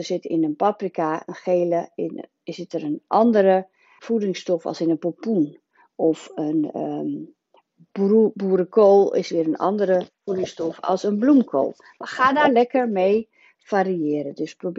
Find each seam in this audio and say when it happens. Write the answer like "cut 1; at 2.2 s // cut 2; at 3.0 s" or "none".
cut 1; at 4.0 s